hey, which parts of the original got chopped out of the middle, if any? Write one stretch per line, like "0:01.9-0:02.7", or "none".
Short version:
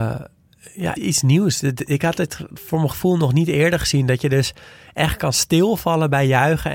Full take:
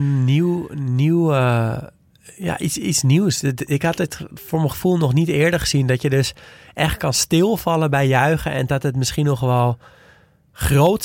0:02.6-0:02.8